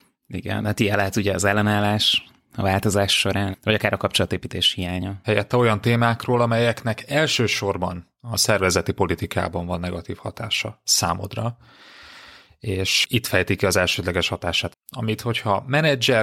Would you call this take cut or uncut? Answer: cut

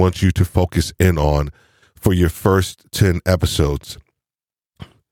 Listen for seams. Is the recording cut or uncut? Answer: uncut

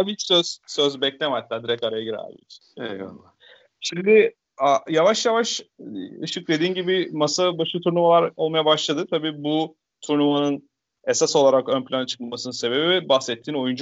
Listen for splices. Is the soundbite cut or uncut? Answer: uncut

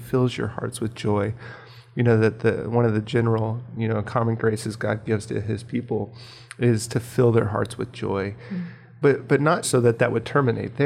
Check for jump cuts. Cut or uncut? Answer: cut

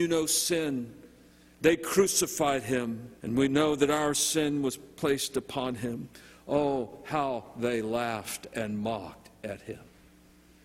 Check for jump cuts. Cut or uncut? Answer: cut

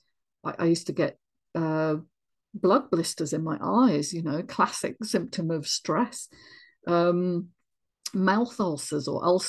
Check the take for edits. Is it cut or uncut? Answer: uncut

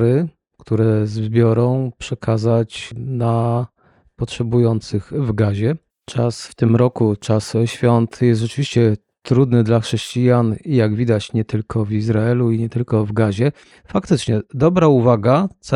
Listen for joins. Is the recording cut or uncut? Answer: cut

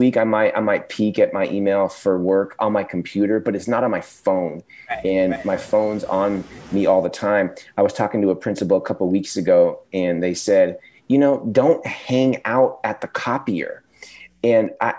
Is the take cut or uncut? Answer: uncut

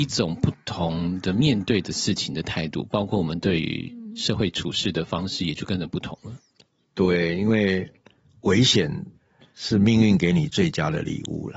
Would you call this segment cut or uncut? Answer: uncut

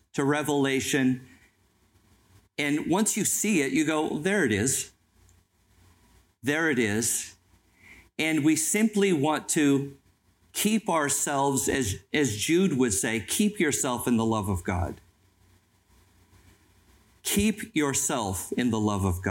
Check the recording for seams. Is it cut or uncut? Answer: uncut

